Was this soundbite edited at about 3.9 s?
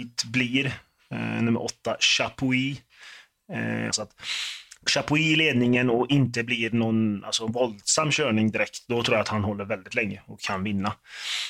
yes; 1 cut; at 3.9 s

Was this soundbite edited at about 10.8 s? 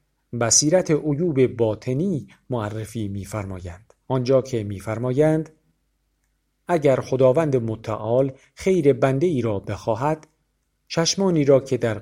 no; 1 cut; at 4.0 s

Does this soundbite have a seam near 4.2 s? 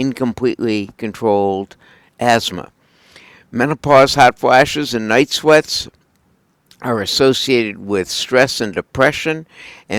no; 0 cuts

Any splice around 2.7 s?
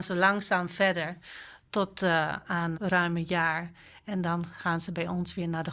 yes; 1 cut; at 2.7 s

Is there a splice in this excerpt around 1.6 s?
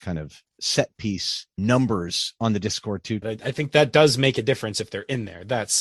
yes; 2 cuts; at 1.6 s, 3.2 s

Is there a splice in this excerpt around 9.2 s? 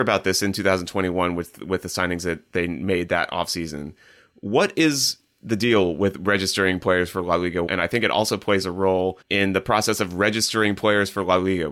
yes; 2 cuts; at 7.7 s, 9.2 s

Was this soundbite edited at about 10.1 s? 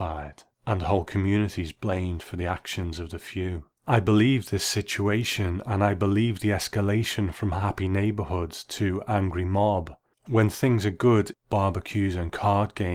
yes; 2 cuts; at 10.1 s, 11.3 s

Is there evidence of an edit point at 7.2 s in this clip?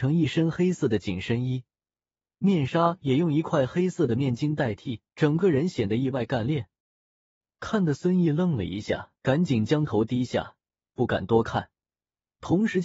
no; 3 cuts; at 2.3 s, 5.1 s, 9.2 s

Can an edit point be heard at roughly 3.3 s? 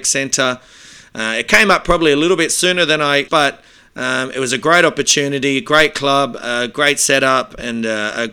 yes; 1 cut; at 3.3 s

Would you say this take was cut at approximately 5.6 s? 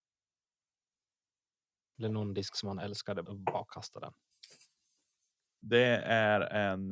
yes; 3 cuts; at 1.9 s, 3.3 s, 5.6 s

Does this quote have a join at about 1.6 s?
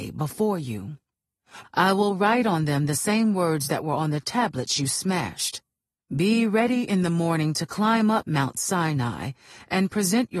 yes; 1 cut; at 1.6 s

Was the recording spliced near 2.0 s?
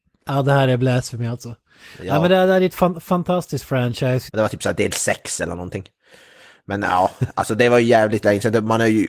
no; 1 cut; at 4.3 s

